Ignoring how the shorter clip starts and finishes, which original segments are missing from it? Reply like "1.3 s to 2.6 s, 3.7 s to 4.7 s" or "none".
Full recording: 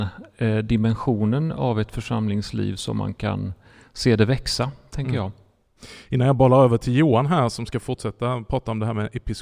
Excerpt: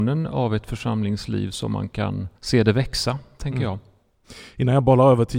3.6 s to 3.9 s